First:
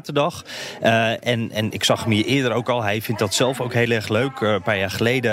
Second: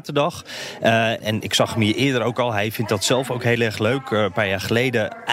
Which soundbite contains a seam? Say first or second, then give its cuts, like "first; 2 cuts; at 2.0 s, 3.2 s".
second; 1 cut; at 1.2 s